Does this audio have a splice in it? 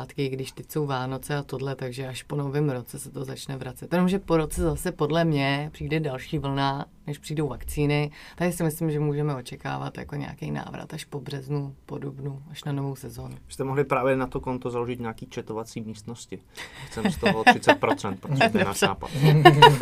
no; 0 cuts

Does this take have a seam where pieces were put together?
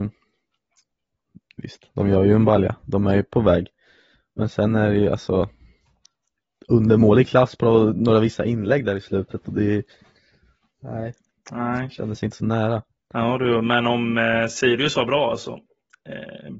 no; 0 cuts

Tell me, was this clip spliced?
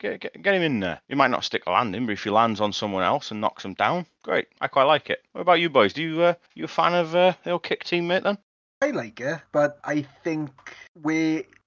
no; 0 cuts

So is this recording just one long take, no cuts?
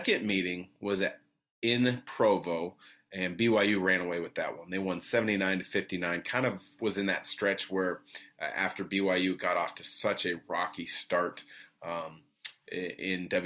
yes; 0 cuts

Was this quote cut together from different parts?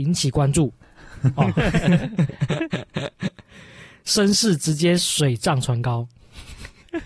no; 0 cuts

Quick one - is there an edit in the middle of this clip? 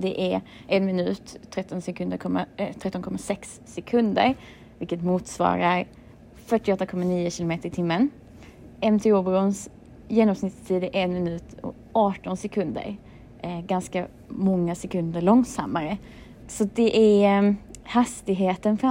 yes; 1 cut; at 16.4 s

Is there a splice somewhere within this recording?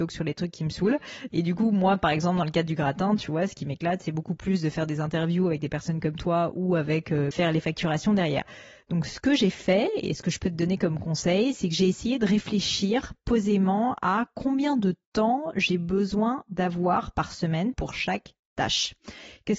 yes; 3 cuts; at 1.3 s, 7.3 s, 17.7 s

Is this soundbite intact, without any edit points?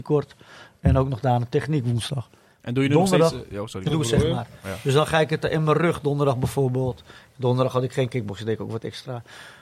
no; 1 cut; at 3.9 s

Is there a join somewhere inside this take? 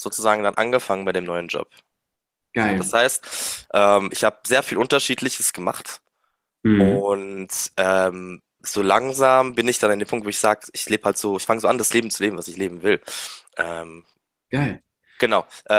no; 0 cuts

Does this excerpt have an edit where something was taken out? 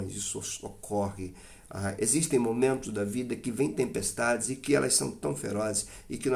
yes; 1 cut; at 2.0 s

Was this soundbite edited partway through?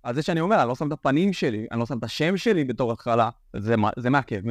no; 0 cuts

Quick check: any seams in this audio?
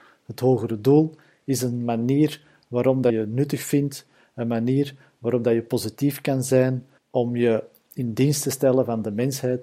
yes; 2 cuts; at 3.1 s, 7.0 s

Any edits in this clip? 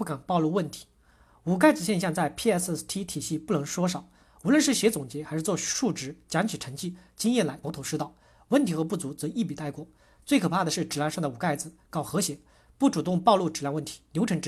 yes; 1 cut; at 7.6 s

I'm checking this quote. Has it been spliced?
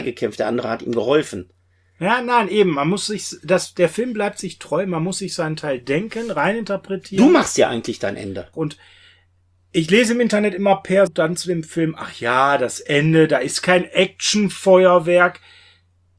yes; 2 cuts; at 8.5 s, 11.1 s

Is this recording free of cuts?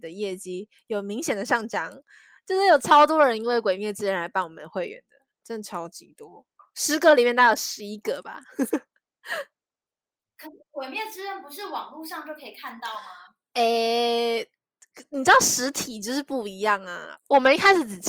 no; 1 cut; at 17.2 s

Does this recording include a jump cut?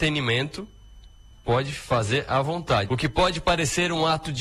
yes; 1 cut; at 2.9 s

